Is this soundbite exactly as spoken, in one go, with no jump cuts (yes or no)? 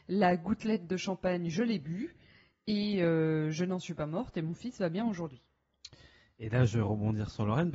yes